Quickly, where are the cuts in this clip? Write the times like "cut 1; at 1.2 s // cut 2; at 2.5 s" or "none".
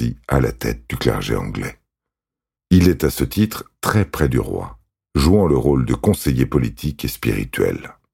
cut 1; at 2.6 s